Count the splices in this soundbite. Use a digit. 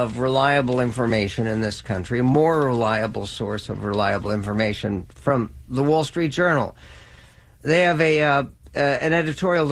0